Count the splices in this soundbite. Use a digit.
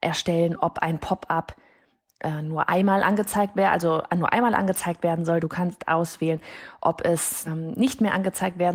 2